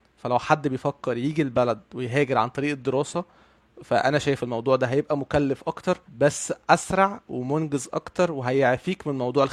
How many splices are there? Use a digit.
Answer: 1